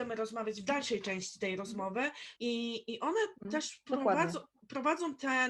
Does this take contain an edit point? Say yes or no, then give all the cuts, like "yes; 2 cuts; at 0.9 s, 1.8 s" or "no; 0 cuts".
yes; 1 cut; at 2.4 s